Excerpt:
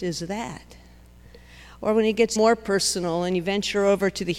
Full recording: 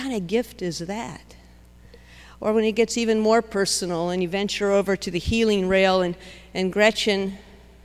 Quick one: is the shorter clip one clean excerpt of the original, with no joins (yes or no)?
no